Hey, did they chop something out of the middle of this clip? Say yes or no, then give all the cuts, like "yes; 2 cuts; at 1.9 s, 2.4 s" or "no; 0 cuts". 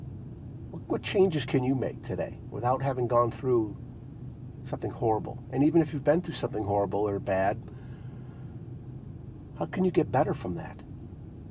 no; 0 cuts